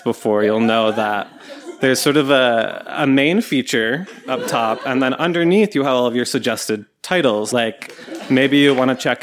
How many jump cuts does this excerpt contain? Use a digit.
1